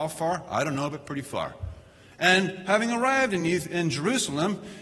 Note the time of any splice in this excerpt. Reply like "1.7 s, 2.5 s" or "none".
none